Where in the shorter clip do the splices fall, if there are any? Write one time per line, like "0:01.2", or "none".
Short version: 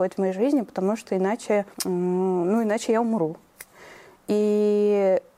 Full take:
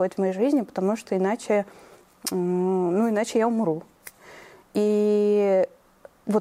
0:01.7